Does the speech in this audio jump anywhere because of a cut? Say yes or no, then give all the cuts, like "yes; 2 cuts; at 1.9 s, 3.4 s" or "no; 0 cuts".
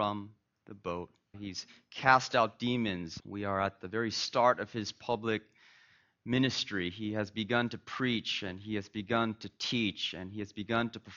yes; 2 cuts; at 1.3 s, 3.2 s